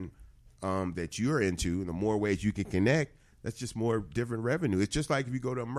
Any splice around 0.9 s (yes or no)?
yes